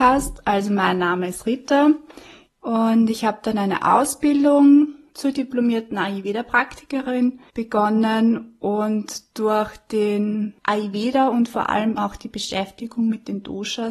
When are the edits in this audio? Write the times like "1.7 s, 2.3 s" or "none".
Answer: 2.5 s, 12.0 s